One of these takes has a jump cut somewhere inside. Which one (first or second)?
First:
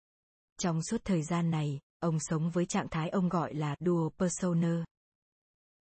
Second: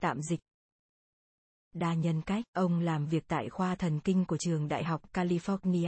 second